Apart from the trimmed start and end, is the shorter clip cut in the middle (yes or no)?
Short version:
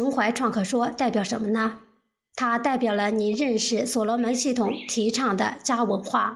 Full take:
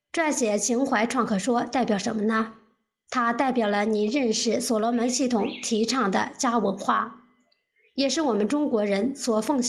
no